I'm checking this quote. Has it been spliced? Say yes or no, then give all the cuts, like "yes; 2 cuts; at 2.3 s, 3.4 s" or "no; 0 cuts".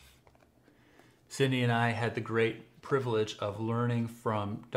no; 0 cuts